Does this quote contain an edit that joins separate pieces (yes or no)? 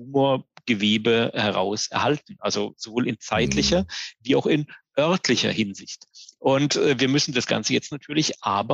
no